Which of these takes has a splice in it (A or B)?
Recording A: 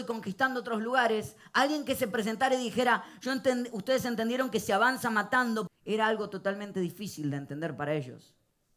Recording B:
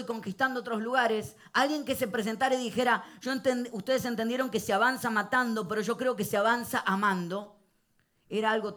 A